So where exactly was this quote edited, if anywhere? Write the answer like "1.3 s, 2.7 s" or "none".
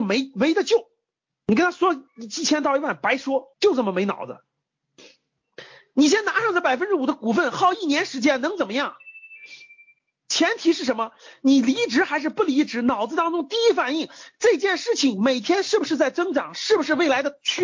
3.5 s